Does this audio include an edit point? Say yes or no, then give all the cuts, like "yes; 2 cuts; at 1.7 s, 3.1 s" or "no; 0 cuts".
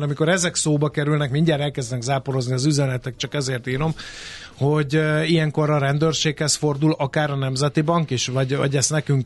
no; 0 cuts